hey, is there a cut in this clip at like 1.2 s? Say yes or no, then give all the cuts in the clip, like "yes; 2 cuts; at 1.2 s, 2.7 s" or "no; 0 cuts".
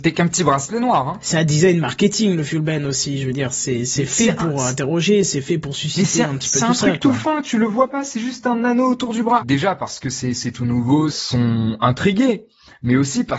no; 2 cuts; at 9.4 s, 11.1 s